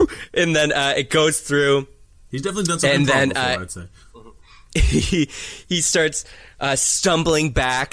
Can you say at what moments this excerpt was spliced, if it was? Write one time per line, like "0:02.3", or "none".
none